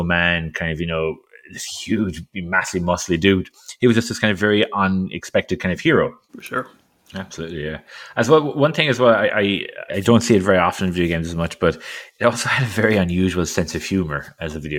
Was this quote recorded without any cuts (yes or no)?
no